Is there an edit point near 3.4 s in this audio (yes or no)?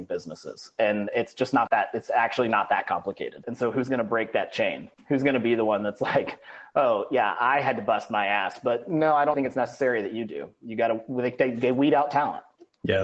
yes